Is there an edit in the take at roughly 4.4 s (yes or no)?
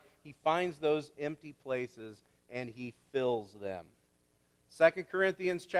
no